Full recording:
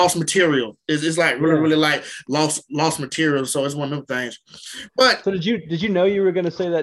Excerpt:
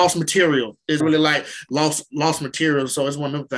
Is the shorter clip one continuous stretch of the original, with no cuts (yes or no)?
no